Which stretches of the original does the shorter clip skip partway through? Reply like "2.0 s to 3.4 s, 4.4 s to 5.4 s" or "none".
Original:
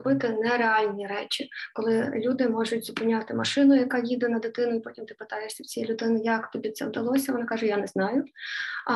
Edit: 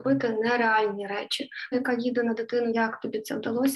1.7 s to 3.8 s, 4.8 s to 6.2 s